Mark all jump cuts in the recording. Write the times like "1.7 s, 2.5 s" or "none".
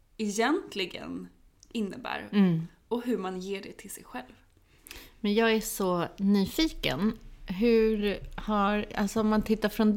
none